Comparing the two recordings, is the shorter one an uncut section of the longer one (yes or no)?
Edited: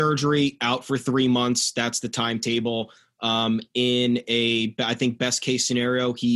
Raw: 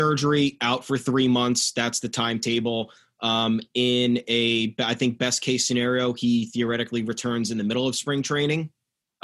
yes